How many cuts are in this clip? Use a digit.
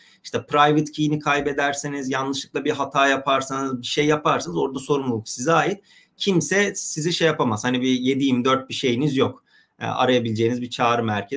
0